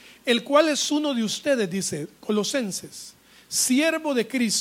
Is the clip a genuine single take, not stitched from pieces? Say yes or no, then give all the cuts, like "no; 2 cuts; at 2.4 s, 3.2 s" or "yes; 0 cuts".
yes; 0 cuts